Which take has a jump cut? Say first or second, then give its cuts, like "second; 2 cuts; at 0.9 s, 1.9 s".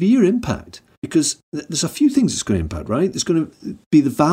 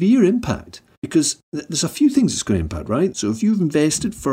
second; 1 cut; at 3.1 s